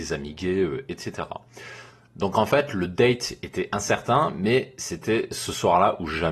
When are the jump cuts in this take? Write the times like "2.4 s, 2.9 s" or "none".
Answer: none